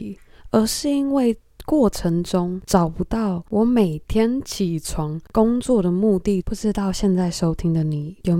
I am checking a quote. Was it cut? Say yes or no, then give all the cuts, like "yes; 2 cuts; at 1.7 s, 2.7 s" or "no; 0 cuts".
yes; 1 cut; at 6.4 s